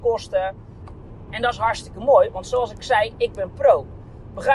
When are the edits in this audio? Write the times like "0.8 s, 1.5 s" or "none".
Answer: 1.3 s